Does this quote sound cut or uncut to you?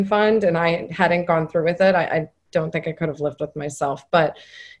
uncut